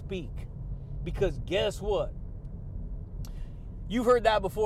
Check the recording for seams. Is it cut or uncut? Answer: uncut